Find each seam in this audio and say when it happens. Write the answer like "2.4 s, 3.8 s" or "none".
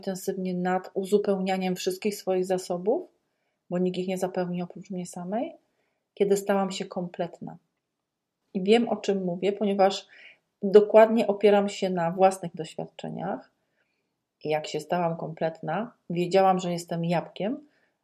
8.4 s, 14.2 s